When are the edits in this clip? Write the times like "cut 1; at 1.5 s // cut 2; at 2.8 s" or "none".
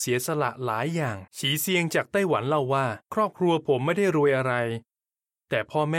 cut 1; at 1.3 s // cut 2; at 3.0 s